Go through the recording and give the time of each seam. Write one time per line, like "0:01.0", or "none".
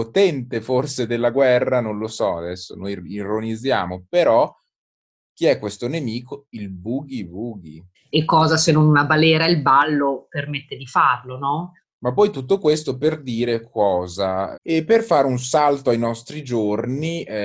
0:07.9
0:11.8
0:14.5